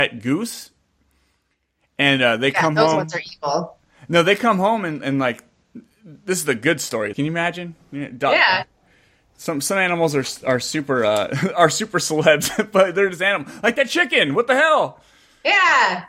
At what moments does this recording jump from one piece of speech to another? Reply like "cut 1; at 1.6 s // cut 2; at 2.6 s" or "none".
cut 1; at 7.1 s